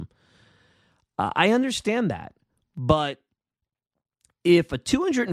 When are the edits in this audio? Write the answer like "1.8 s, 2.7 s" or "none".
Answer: none